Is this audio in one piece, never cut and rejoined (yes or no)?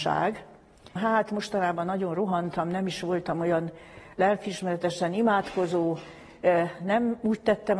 no